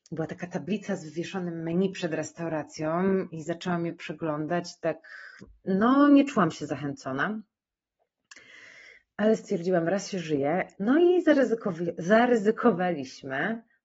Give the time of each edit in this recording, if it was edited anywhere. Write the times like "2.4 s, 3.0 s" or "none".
10.7 s